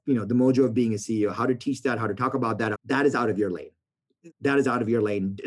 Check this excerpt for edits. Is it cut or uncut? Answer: cut